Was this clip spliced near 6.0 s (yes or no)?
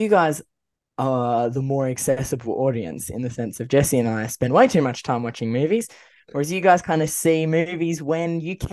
no